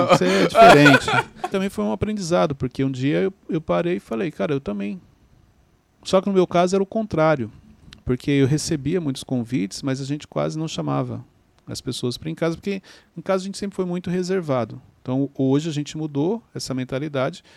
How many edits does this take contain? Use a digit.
1